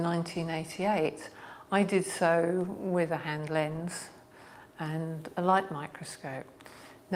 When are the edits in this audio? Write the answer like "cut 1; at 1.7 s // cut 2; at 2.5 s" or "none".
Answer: none